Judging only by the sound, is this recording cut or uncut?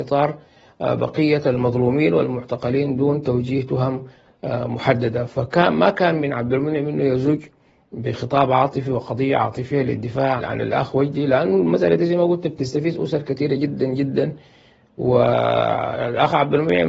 cut